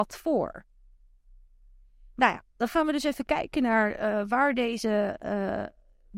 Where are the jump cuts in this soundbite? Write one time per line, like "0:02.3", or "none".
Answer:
none